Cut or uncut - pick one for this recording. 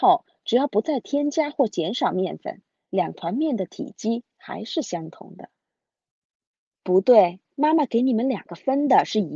cut